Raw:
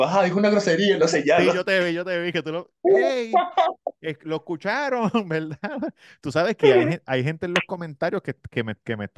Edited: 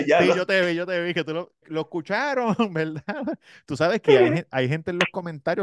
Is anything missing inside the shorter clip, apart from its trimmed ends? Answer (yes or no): yes